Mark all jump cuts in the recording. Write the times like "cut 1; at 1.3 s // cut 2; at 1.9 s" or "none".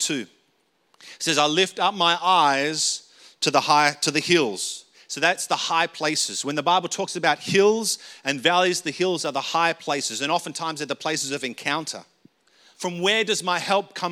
cut 1; at 12.7 s